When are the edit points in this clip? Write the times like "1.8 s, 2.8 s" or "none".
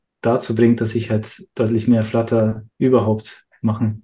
2.7 s